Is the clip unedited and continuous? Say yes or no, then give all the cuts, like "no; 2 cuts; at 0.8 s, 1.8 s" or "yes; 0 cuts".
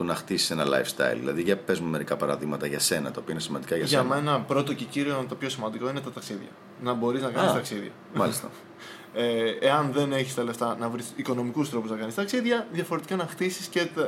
yes; 0 cuts